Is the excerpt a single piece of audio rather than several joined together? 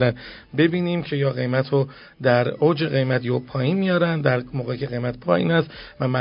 no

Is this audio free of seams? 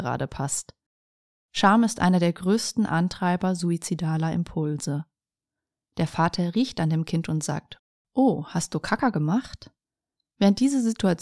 no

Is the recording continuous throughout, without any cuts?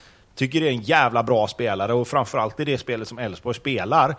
yes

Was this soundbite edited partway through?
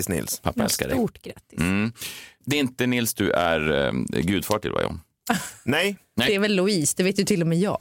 no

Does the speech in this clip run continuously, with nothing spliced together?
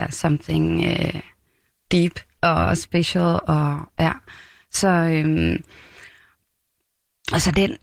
yes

